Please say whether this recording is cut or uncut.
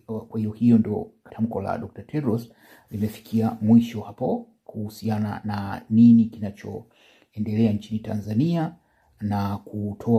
cut